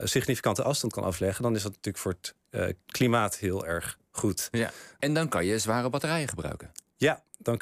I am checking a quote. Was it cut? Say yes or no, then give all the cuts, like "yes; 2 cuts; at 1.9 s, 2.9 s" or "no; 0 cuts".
yes; 2 cuts; at 2.8 s, 5.0 s